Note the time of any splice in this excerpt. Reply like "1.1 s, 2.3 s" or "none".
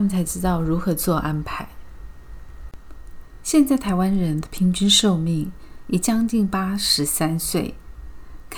none